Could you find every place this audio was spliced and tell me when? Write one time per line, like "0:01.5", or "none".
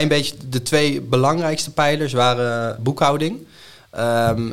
0:02.8